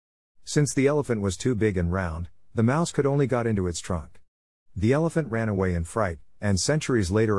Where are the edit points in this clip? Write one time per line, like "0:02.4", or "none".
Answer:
none